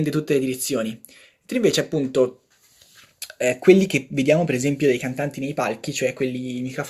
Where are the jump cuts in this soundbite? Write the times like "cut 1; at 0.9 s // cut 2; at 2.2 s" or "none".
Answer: none